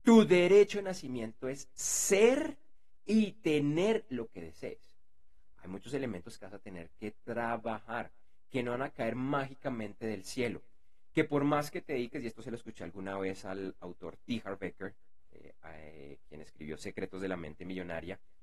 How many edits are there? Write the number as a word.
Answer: one